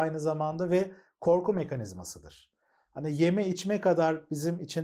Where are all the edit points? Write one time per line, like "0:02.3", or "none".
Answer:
none